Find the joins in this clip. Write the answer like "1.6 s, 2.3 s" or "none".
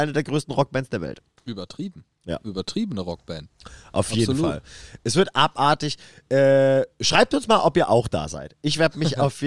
none